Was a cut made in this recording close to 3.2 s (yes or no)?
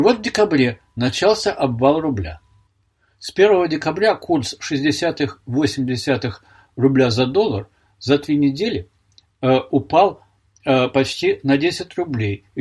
no